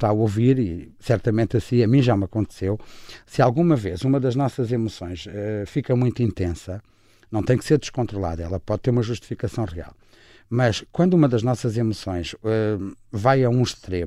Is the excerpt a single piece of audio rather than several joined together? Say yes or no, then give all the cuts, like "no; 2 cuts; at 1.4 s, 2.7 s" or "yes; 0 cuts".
yes; 0 cuts